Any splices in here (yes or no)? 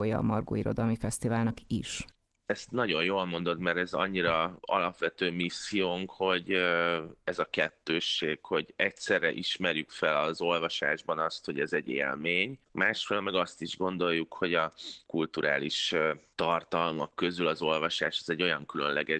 no